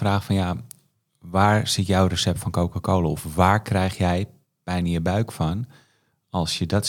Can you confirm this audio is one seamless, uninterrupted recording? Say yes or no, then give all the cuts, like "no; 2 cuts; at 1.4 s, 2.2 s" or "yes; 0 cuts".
yes; 0 cuts